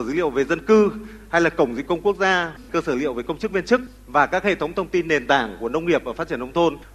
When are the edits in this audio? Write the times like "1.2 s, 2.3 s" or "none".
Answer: 2.6 s